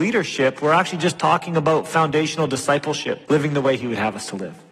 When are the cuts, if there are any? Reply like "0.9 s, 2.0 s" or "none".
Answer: 3.2 s